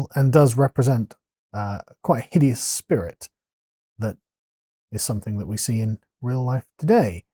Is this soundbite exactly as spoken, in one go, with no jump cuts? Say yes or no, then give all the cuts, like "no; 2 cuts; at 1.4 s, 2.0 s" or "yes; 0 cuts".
yes; 0 cuts